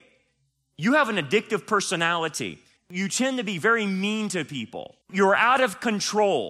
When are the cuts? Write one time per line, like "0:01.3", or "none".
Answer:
0:02.8
0:05.0